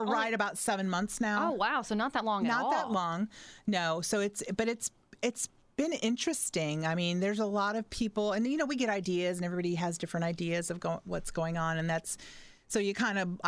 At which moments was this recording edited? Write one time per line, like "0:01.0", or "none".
none